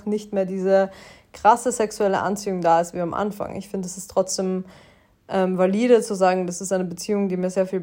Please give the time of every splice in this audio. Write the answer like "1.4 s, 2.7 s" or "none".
none